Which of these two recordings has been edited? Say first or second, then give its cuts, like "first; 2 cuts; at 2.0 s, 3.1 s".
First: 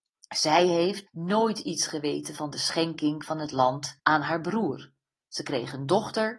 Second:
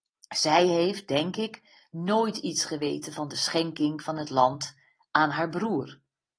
first; 2 cuts; at 1.1 s, 4.0 s